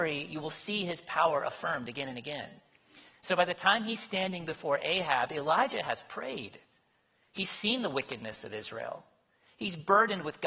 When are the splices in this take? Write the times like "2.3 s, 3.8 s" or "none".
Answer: 3.1 s

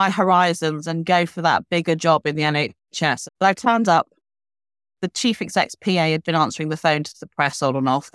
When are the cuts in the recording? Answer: 3.2 s, 6.2 s

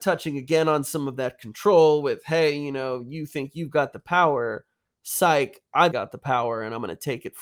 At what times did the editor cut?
5.9 s

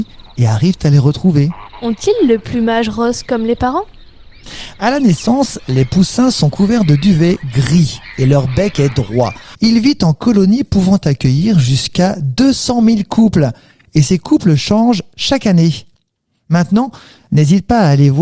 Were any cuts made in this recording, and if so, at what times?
9.5 s, 17.3 s

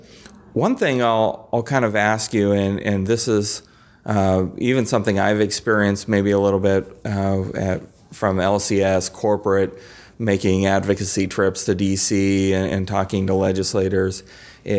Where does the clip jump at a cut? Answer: none

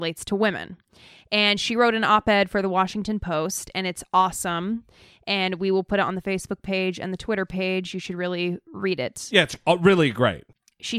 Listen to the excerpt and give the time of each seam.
none

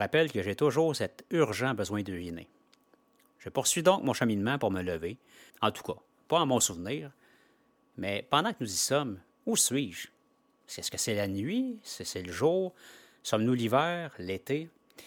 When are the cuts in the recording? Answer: 5.5 s

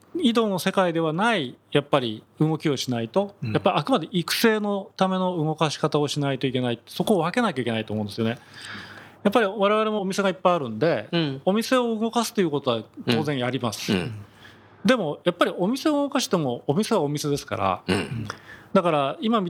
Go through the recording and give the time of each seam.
none

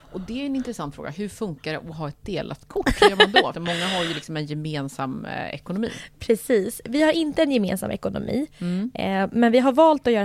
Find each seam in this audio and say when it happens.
3.5 s

